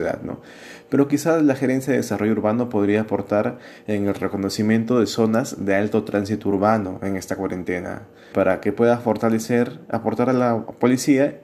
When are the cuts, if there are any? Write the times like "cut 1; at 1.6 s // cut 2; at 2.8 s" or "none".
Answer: cut 1; at 8.3 s

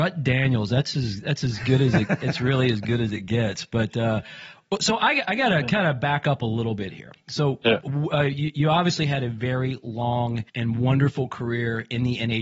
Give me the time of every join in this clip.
cut 1; at 10.5 s

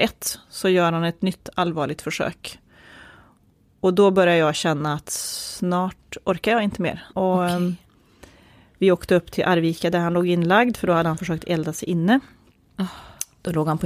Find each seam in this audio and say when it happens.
cut 1; at 7.1 s

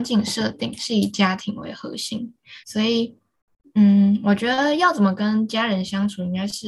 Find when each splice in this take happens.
cut 1; at 2.6 s

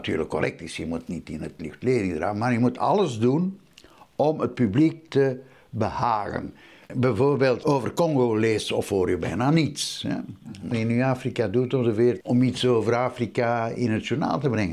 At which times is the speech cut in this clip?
cut 1; at 10.7 s // cut 2; at 12.2 s

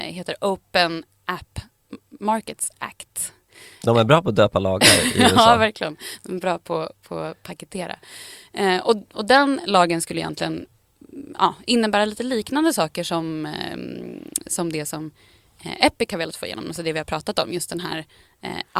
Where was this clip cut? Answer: none

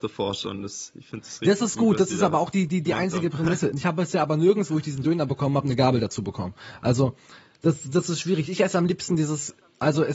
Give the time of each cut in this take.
none

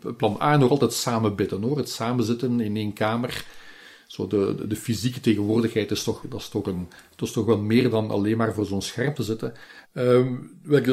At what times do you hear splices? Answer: cut 1; at 6.2 s // cut 2; at 9.8 s

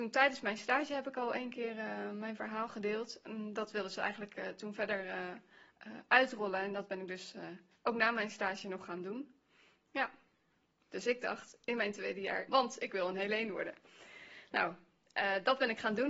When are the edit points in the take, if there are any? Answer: cut 1; at 10.8 s // cut 2; at 12.5 s

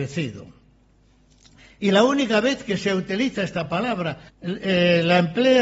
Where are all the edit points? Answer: cut 1; at 4.3 s

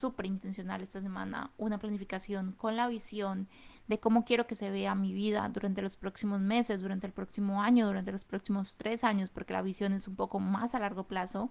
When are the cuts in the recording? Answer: none

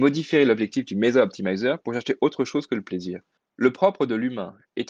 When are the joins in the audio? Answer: cut 1; at 3.4 s

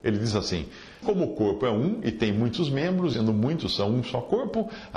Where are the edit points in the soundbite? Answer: cut 1; at 1.0 s // cut 2; at 3.1 s

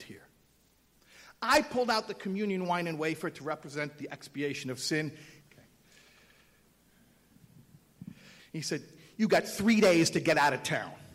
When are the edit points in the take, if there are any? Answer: cut 1; at 5.4 s // cut 2; at 8.4 s

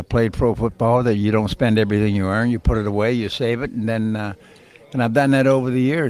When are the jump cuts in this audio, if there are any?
none

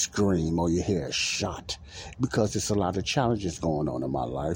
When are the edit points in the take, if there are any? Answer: cut 1; at 2.1 s

